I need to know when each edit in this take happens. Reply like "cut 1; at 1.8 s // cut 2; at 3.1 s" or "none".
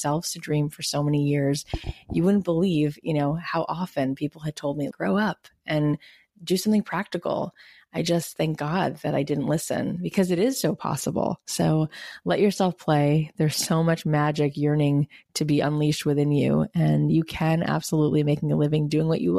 cut 1; at 4.9 s